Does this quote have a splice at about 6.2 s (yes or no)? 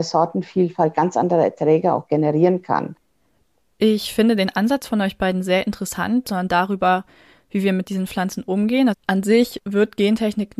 yes